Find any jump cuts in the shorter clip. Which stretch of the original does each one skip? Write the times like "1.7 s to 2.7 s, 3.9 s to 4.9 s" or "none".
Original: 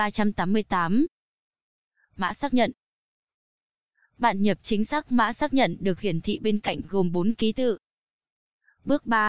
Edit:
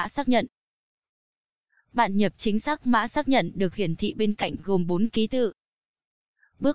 none